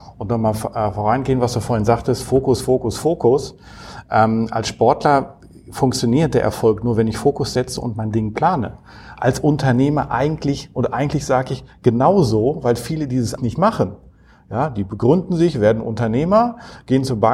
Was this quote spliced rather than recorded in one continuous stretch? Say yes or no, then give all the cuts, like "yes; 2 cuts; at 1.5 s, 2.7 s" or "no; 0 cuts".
yes; 1 cut; at 13.4 s